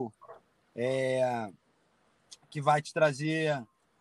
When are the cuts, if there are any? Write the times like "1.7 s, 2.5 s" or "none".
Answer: none